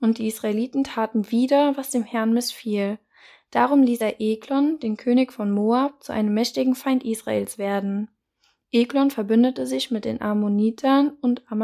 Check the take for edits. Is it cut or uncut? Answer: uncut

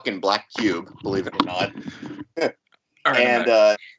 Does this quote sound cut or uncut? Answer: uncut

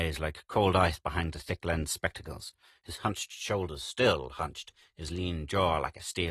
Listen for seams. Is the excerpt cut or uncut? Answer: uncut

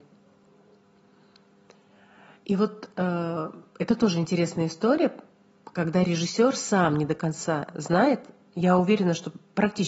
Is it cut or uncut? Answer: uncut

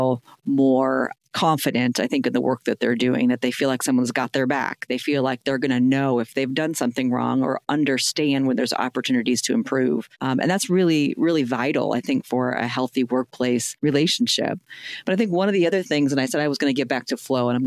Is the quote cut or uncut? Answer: uncut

